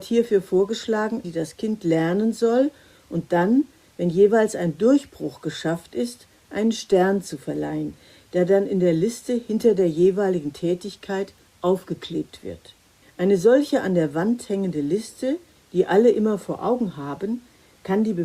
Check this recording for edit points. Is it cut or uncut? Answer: cut